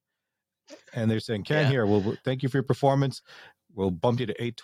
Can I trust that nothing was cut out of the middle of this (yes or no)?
yes